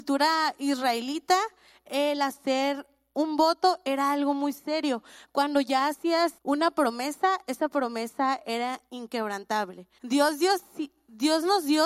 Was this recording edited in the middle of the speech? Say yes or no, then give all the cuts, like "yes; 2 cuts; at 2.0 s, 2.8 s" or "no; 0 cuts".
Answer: yes; 2 cuts; at 6.4 s, 10.0 s